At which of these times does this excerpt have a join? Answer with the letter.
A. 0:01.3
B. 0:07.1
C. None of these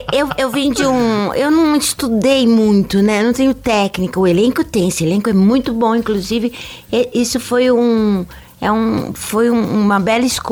C